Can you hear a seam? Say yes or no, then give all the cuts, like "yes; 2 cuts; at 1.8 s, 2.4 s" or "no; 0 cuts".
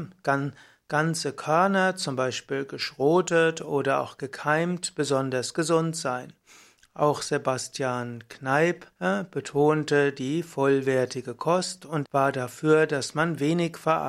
yes; 2 cuts; at 8.9 s, 12.0 s